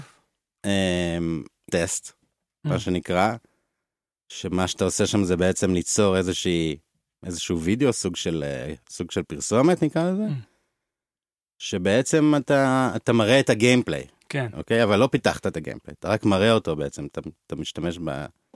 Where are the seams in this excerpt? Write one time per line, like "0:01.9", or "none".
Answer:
0:01.7